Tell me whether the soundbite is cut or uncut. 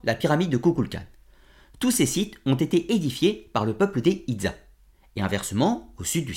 uncut